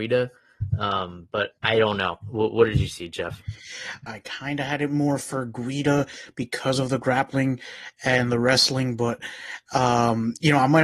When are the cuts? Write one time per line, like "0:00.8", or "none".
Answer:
0:01.6
0:04.1